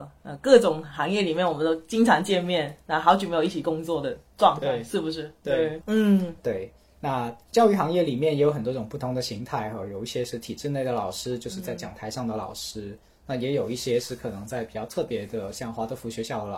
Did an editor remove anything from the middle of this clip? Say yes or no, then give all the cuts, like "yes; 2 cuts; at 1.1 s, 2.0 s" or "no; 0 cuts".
yes; 1 cut; at 5.8 s